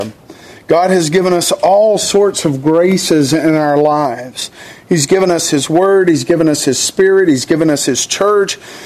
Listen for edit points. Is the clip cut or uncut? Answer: uncut